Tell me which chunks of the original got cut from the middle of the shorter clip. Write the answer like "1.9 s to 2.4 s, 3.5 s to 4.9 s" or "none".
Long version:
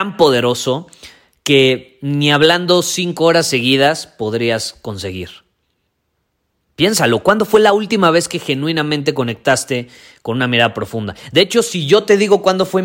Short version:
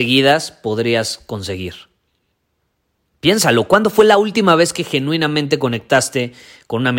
none